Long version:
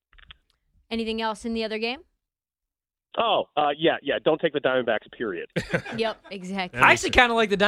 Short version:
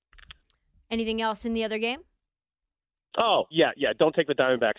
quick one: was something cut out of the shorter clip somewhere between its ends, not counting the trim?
yes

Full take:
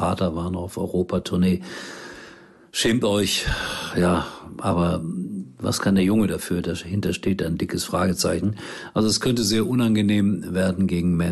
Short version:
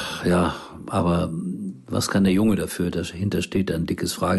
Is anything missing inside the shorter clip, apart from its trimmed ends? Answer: no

